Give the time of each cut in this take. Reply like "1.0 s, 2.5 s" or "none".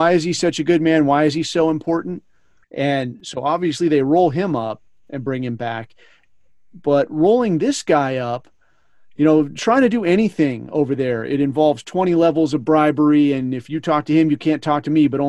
2.6 s